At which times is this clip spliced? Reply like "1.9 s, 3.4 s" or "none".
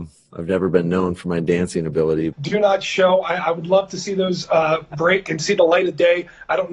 2.3 s